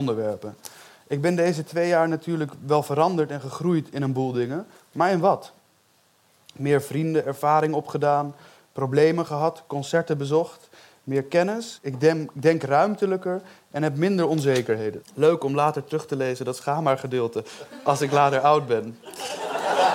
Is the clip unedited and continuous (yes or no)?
no